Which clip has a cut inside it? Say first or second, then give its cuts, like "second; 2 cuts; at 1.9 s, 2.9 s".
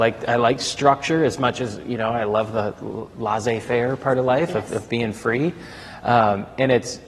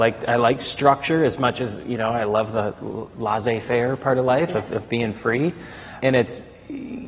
second; 1 cut; at 6.0 s